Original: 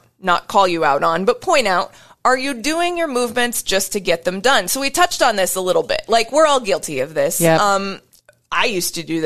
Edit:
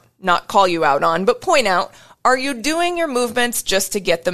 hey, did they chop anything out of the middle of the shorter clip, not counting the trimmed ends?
no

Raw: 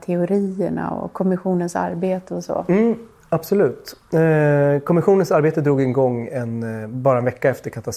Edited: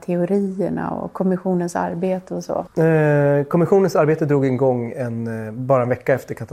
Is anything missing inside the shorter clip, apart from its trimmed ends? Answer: yes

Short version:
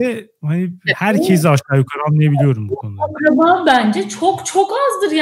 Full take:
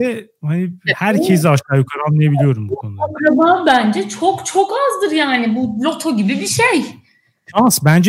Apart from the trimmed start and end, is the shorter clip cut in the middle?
no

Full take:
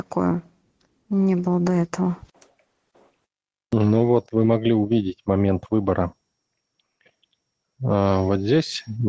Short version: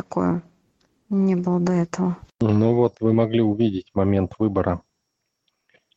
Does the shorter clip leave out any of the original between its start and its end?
yes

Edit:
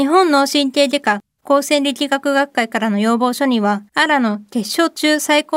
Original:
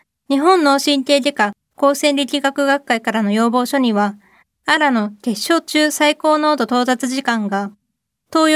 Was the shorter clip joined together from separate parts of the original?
yes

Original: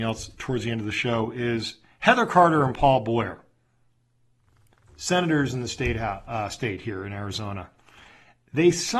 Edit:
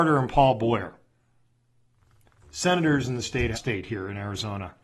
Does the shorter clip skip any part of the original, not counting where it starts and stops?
yes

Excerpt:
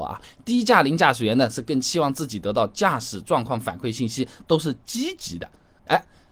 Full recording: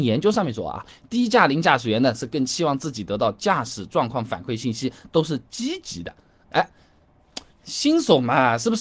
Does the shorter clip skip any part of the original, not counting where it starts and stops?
no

